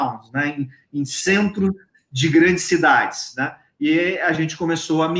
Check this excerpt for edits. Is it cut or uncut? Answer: uncut